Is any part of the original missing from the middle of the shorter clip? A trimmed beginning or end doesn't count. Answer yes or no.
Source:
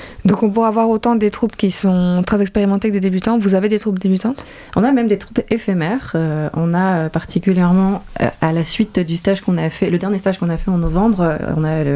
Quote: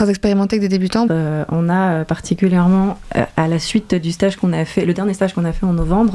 yes